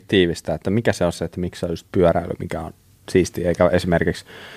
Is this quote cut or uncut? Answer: uncut